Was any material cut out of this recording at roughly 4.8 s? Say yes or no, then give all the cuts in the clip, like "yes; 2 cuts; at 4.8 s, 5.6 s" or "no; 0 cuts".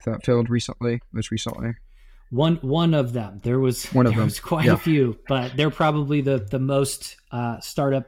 no; 0 cuts